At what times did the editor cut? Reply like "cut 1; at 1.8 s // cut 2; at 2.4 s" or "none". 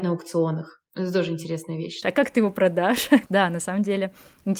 cut 1; at 2.0 s // cut 2; at 3.3 s